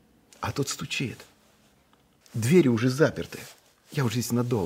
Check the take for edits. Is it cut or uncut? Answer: cut